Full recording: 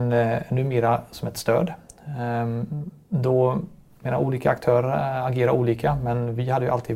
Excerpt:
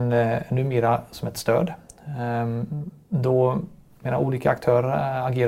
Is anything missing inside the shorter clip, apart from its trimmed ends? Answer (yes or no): no